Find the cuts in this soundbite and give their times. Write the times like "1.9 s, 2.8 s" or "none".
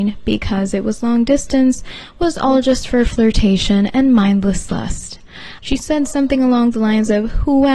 5.6 s